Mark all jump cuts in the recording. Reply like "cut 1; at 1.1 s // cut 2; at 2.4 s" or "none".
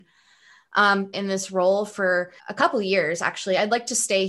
cut 1; at 1.1 s // cut 2; at 2.4 s